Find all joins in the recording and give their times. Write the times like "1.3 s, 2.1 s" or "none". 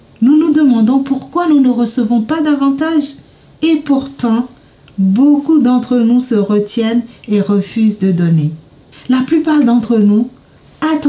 8.9 s